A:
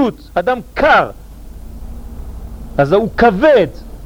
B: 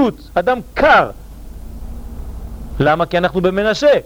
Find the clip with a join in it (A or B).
B